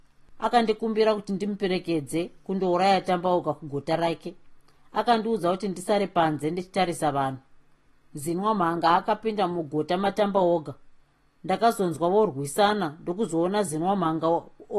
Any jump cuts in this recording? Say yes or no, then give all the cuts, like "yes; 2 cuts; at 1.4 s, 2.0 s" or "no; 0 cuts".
no; 0 cuts